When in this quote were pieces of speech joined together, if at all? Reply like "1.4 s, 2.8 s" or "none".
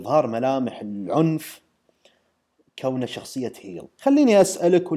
3.9 s